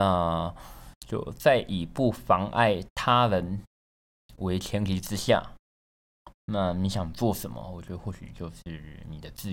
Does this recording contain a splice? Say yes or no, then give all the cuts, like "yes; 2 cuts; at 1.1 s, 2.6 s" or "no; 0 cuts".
yes; 1 cut; at 1.0 s